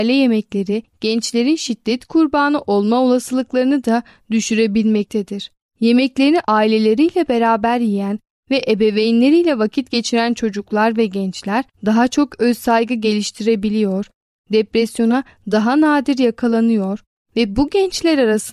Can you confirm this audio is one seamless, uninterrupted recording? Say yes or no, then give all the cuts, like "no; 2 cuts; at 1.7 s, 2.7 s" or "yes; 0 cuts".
no; 2 cuts; at 5.6 s, 11.7 s